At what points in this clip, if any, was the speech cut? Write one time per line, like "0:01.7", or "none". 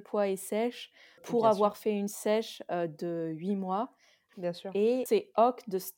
0:01.2
0:04.3